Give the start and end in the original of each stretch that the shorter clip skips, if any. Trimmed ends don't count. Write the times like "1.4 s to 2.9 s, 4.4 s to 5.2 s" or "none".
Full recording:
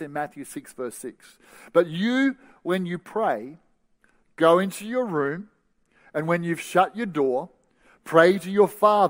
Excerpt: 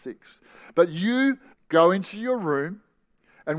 2.5 s to 4.2 s